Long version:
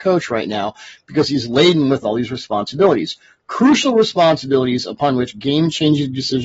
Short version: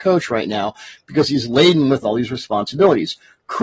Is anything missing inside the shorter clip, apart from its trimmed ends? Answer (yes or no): no